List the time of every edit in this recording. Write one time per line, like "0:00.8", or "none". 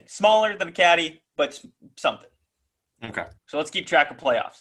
0:03.4